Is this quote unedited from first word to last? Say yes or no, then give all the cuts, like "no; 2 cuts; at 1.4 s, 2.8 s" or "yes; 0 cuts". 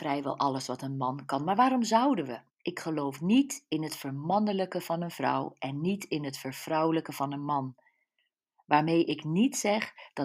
no; 1 cut; at 2.5 s